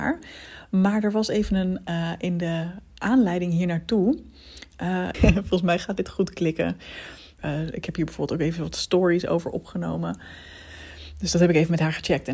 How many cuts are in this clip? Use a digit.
2